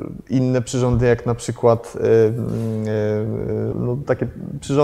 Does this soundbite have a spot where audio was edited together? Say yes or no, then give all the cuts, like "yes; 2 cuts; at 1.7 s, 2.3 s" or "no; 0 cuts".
yes; 1 cut; at 3.7 s